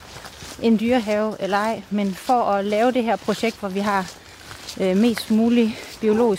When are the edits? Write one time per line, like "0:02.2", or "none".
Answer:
none